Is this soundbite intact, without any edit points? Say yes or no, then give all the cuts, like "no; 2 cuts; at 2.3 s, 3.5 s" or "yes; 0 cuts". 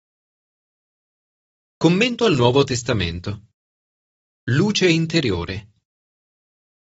yes; 0 cuts